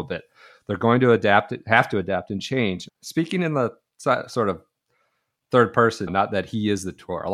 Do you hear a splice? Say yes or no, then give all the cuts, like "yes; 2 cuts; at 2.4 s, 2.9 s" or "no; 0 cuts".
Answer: yes; 2 cuts; at 2.9 s, 6.1 s